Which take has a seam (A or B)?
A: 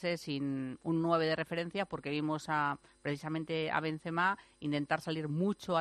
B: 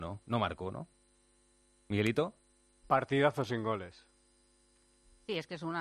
B